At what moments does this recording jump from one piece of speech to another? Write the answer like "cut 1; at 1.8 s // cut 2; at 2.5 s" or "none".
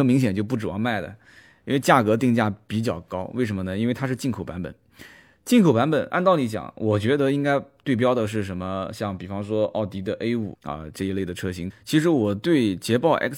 cut 1; at 10.5 s // cut 2; at 11.7 s